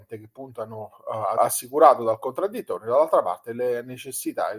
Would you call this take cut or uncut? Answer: cut